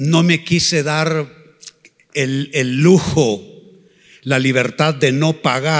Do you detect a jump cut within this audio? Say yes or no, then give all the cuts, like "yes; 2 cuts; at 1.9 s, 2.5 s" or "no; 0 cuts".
no; 0 cuts